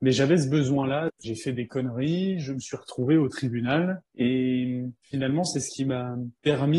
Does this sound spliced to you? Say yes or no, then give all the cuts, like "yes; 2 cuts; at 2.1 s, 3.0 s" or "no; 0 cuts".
yes; 1 cut; at 1.2 s